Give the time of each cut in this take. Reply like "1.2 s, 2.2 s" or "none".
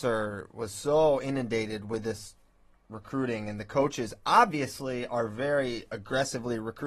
none

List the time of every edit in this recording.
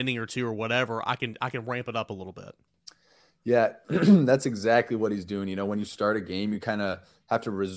none

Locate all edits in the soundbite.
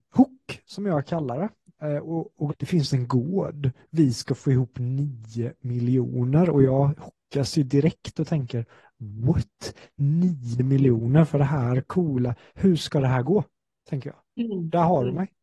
2.5 s

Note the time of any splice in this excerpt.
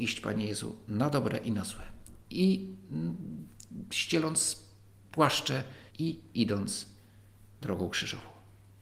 2.2 s, 5.9 s

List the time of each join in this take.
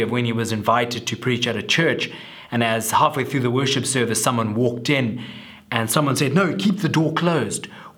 none

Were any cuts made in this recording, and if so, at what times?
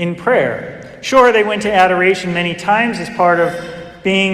none

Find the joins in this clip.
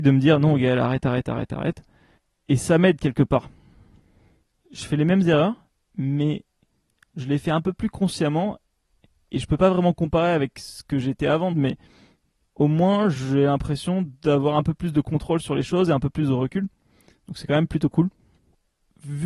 11.5 s

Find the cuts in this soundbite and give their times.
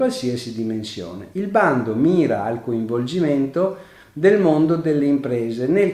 none

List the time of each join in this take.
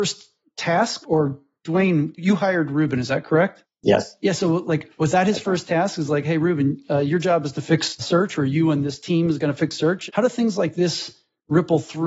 10.1 s

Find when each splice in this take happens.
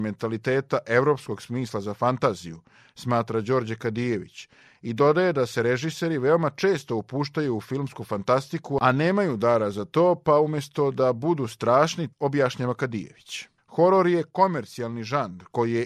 12.1 s, 13.6 s

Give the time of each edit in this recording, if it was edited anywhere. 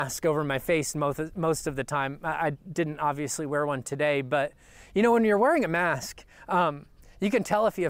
none

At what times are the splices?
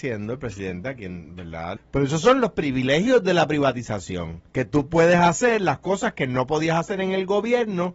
1.8 s, 4.5 s

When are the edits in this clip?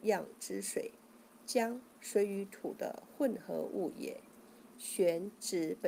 4.7 s

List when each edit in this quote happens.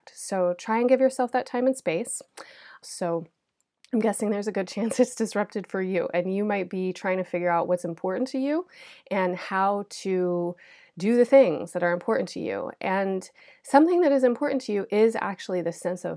2.8 s

